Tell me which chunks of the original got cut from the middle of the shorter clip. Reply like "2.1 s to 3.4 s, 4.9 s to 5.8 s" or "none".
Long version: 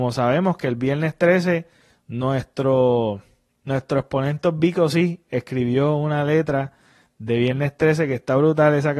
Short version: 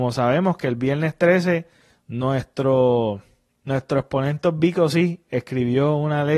none